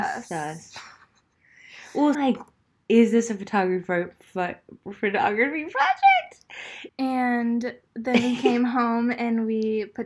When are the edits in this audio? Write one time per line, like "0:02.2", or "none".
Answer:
0:02.1
0:06.9